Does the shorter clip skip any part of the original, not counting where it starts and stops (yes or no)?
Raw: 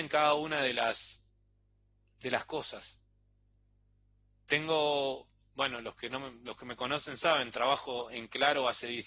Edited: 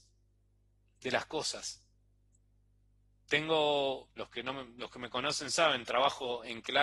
yes